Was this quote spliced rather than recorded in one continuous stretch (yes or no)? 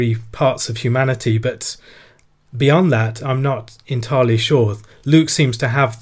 no